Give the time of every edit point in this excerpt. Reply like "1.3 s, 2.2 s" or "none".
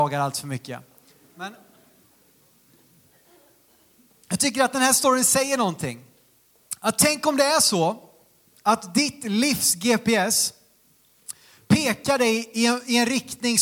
none